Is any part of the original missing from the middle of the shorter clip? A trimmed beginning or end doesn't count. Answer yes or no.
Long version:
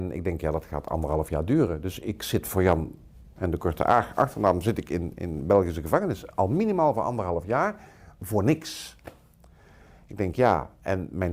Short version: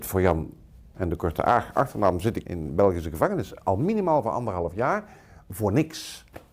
yes